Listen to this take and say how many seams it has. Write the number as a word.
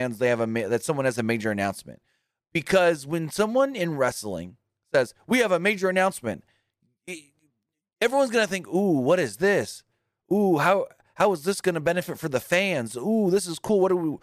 zero